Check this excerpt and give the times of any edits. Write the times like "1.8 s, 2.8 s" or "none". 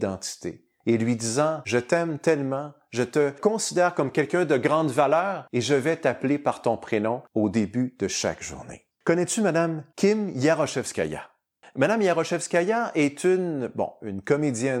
8.9 s